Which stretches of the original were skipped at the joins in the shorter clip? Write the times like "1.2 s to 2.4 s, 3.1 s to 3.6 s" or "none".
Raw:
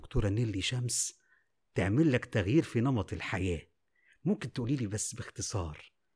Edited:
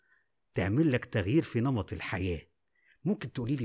none